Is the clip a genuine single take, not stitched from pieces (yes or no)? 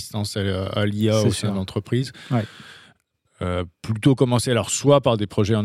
yes